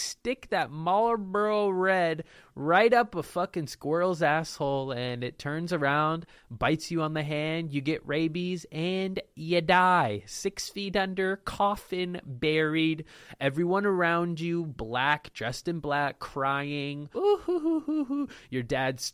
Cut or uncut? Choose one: cut